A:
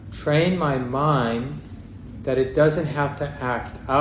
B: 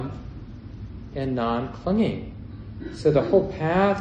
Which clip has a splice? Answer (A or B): B